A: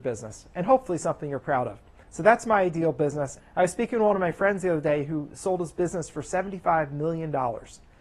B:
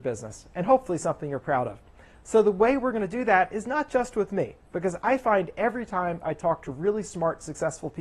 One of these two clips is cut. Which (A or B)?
A